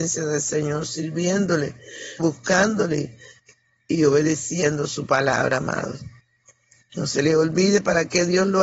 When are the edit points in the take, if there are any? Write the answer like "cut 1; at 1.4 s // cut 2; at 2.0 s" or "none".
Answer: cut 1; at 2.2 s